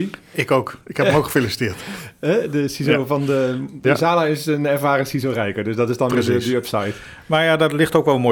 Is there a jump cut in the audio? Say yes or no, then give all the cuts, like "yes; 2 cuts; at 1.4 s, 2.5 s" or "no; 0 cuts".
yes; 1 cut; at 3.8 s